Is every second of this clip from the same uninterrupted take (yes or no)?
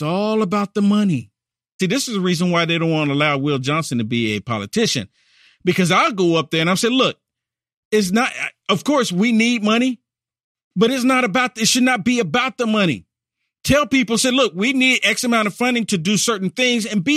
no